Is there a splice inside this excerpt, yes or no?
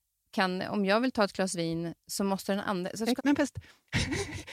yes